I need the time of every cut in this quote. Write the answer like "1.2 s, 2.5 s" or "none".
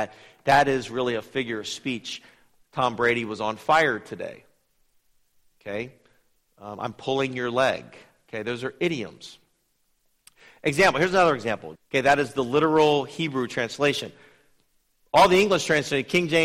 11.8 s